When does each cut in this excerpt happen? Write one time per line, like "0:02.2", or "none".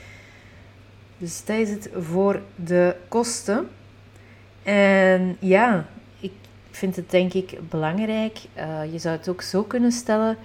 0:03.1